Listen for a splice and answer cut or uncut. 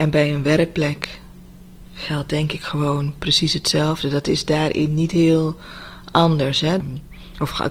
cut